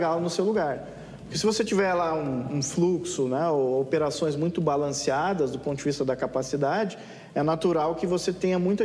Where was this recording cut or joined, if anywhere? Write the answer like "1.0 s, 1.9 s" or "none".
none